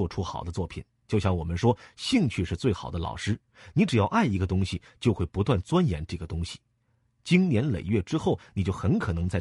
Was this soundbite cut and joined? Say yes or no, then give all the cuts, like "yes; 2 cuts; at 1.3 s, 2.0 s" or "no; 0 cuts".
no; 0 cuts